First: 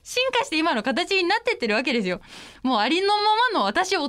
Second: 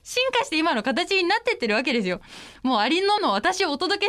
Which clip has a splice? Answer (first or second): second